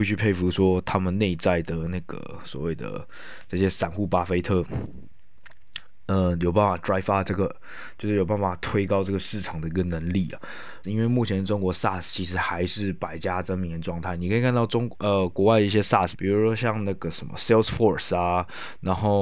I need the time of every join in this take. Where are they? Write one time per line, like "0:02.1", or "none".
0:10.8
0:16.1